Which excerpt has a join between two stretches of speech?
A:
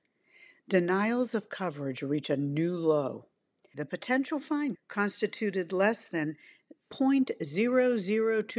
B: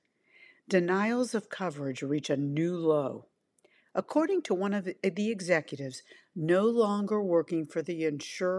A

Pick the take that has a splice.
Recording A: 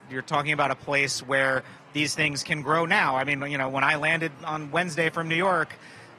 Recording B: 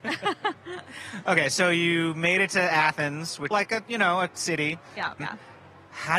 B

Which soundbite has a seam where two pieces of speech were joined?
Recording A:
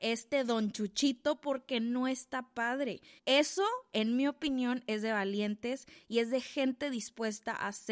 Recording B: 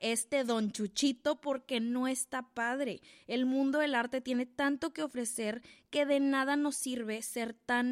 A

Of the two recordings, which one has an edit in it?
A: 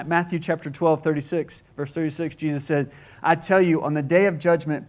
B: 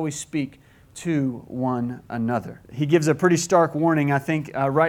B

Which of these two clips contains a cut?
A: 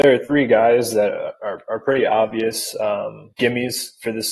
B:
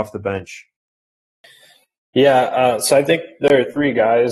A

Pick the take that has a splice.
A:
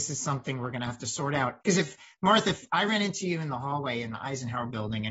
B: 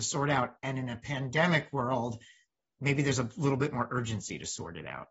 A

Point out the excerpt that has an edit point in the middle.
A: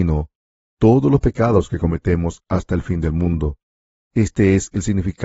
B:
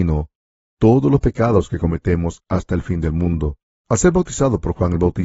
B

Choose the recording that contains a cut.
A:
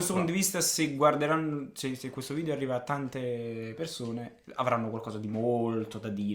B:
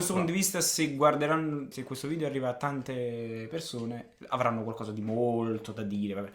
B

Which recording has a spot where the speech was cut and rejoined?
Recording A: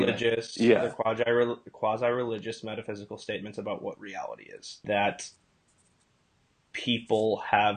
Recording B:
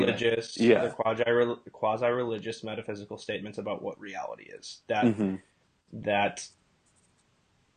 A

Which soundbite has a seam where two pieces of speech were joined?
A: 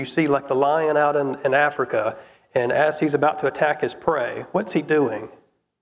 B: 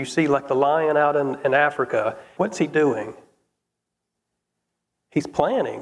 B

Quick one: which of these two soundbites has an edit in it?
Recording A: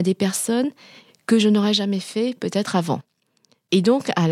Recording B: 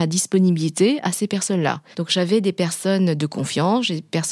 B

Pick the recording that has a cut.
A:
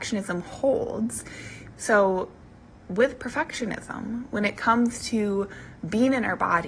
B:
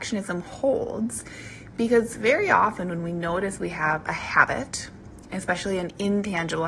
A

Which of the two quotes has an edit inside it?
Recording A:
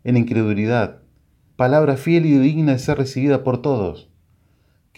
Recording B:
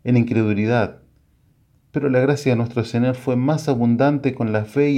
A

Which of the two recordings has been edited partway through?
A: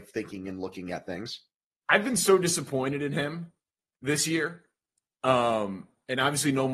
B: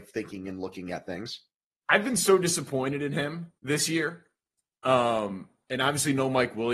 B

